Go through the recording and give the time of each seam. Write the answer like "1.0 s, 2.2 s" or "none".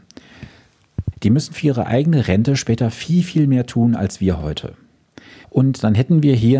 1.1 s, 5.4 s